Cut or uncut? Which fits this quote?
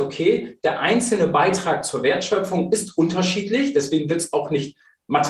uncut